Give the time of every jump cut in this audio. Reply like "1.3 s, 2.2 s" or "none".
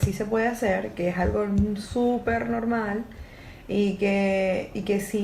none